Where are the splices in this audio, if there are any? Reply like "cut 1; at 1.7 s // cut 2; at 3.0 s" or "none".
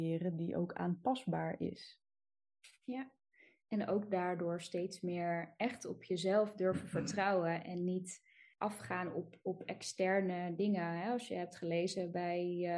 none